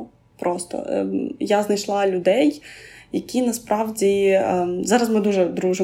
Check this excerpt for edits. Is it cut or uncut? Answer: uncut